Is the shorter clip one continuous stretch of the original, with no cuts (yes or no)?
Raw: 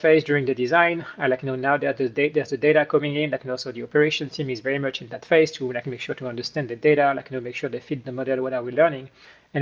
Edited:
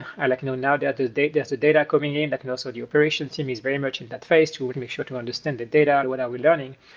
no